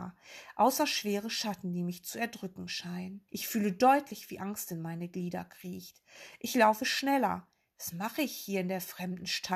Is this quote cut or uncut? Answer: cut